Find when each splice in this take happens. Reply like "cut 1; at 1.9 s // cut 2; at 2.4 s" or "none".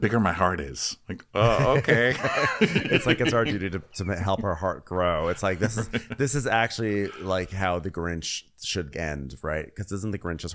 cut 1; at 8.9 s

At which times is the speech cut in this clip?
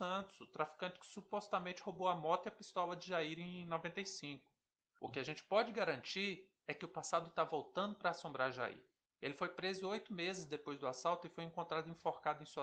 cut 1; at 4.8 s // cut 2; at 9.1 s

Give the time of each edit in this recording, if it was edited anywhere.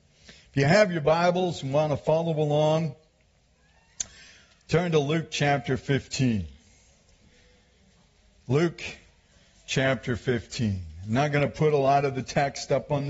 none

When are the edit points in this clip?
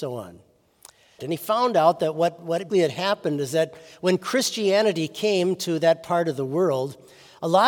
cut 1; at 1.2 s // cut 2; at 2.7 s

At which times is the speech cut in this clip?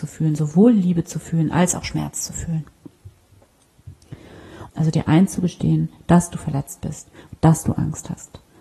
cut 1; at 4.7 s

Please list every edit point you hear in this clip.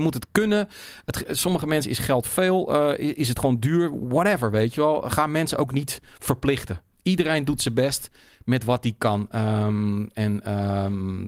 none

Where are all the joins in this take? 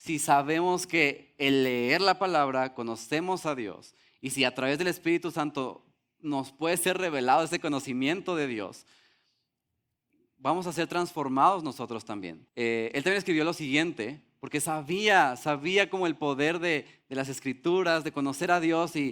cut 1; at 12.5 s

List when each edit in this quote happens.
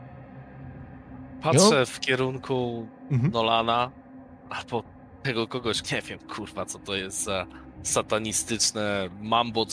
cut 1; at 5.8 s

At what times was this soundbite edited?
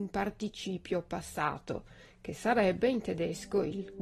none

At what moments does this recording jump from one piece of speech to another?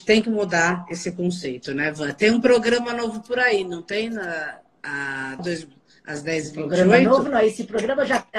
cut 1; at 5.4 s

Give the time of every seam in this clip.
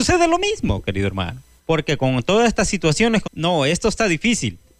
cut 1; at 1.6 s // cut 2; at 3.2 s

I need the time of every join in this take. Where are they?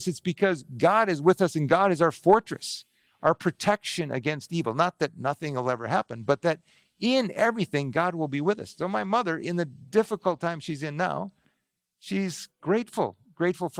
none

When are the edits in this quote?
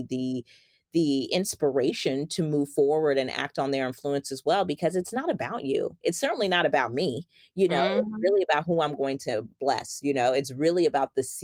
none

